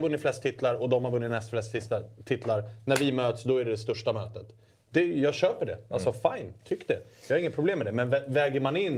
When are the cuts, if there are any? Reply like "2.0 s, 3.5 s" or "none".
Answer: none